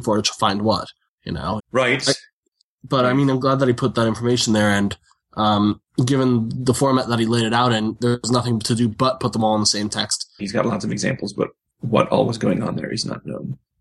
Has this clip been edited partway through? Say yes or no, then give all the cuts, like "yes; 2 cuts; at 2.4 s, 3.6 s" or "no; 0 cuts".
yes; 2 cuts; at 1.6 s, 10.4 s